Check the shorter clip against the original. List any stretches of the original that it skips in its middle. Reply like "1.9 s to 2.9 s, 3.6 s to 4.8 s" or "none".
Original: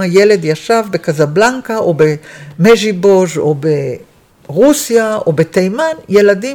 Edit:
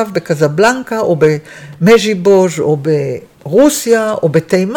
4.1 s to 4.4 s